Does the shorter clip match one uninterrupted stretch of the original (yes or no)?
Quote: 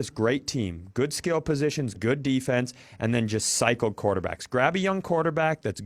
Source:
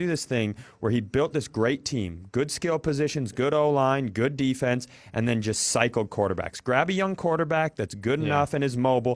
no